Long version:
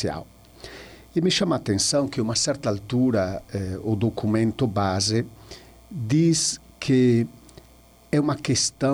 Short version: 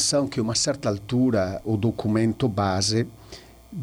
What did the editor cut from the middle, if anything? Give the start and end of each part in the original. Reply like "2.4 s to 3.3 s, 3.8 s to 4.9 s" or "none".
3.4 s to 3.8 s